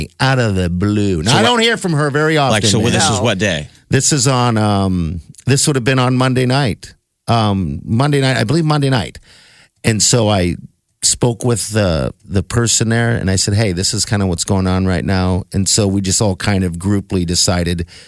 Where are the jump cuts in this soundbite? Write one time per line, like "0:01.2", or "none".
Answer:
none